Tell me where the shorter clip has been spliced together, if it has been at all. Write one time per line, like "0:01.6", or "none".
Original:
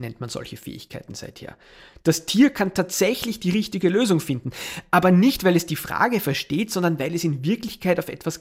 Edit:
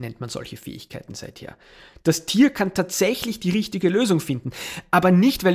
none